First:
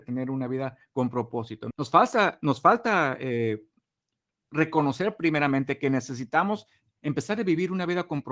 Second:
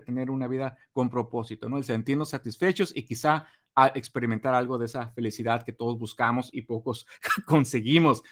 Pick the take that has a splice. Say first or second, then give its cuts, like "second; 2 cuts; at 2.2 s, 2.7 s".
first; 1 cut; at 1.7 s